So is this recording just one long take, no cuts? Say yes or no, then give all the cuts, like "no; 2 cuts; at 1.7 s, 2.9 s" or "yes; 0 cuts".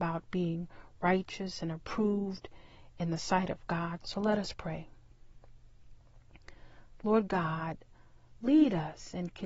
no; 2 cuts; at 4.0 s, 7.0 s